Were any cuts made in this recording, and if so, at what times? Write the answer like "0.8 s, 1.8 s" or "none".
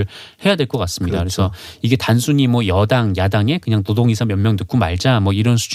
none